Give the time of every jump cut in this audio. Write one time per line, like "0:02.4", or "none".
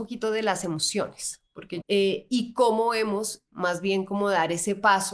0:01.8
0:03.5